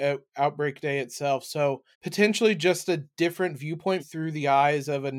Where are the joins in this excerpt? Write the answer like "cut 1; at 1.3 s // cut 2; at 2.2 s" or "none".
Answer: cut 1; at 1.9 s // cut 2; at 4.0 s